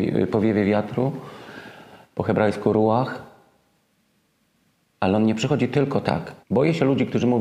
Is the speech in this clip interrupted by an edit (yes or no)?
yes